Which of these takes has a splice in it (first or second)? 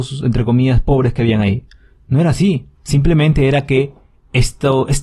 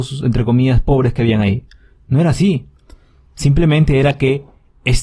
first